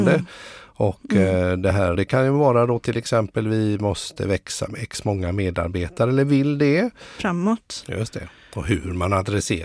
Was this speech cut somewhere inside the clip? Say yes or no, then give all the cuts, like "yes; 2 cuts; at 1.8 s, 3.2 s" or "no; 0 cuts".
yes; 2 cuts; at 1.9 s, 7.2 s